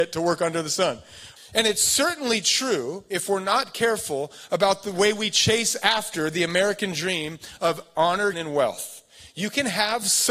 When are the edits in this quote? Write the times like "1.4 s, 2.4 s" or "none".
1.4 s, 8.3 s